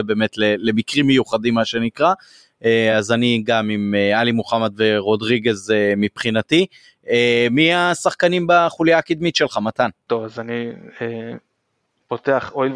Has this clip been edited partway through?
no; 0 cuts

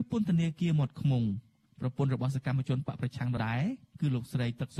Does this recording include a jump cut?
yes; 1 cut; at 3.4 s

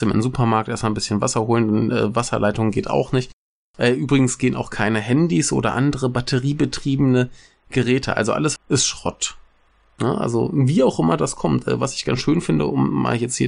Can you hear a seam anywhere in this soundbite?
yes; 1 cut; at 8.6 s

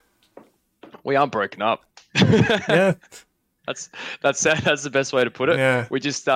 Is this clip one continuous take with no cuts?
yes; 0 cuts

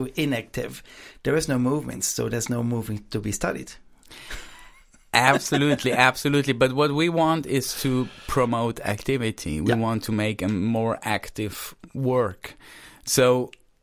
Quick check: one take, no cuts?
yes; 0 cuts

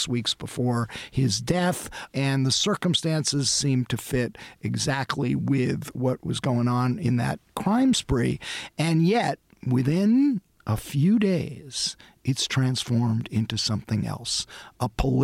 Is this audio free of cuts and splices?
yes; 0 cuts

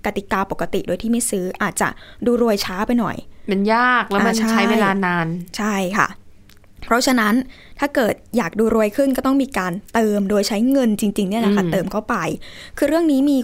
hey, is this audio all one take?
yes; 0 cuts

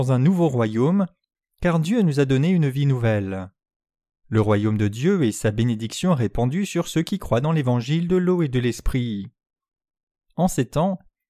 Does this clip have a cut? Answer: no; 0 cuts

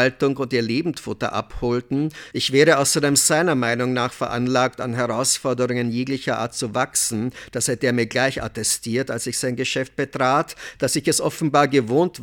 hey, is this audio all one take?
no; 1 cut; at 2.3 s

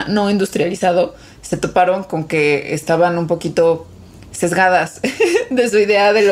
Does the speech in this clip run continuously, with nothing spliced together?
yes; 0 cuts

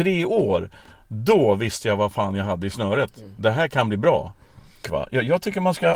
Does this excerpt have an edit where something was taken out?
yes; 1 cut; at 4.8 s

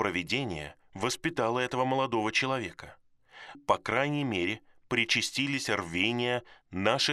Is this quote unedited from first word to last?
no; 1 cut; at 3.5 s

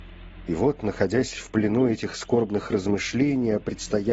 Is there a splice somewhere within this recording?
no; 0 cuts

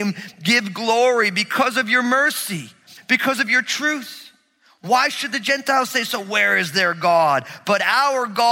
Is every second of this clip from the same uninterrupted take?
yes; 0 cuts

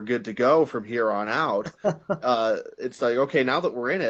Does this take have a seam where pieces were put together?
no; 0 cuts

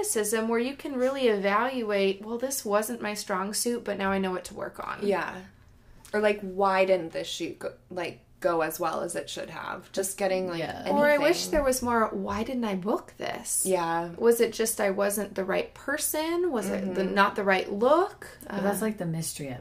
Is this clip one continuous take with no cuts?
yes; 0 cuts

